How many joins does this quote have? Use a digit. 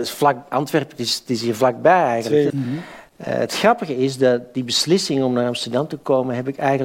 1